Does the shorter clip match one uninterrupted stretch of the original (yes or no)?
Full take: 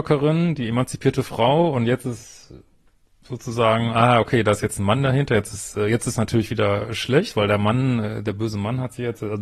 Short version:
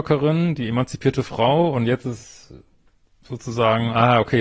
yes